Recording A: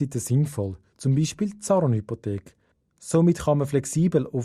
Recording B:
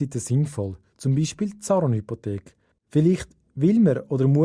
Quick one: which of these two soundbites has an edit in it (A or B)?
B